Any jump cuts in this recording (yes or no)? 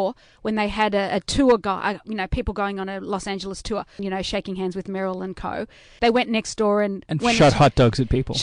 yes